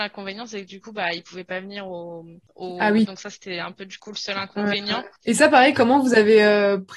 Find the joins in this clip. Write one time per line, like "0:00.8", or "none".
0:03.0
0:05.2